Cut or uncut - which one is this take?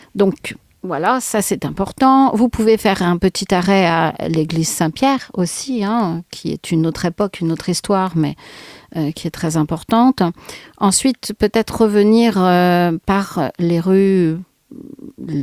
uncut